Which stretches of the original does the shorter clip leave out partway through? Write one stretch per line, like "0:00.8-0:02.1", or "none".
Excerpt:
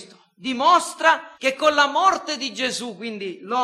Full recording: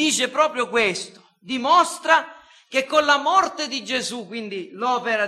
0:02.4-0:02.7